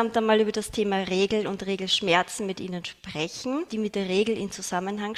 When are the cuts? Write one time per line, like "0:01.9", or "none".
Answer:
0:03.7